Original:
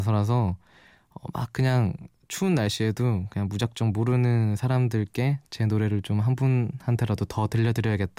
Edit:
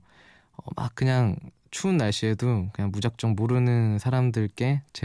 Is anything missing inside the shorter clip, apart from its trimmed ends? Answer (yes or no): no